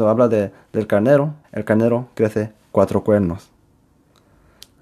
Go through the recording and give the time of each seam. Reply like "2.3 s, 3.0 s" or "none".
1.4 s